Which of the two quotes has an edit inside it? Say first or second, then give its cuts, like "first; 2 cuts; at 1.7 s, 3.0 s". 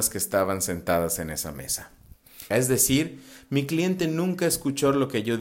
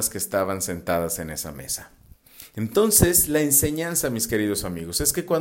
first; 1 cut; at 2.5 s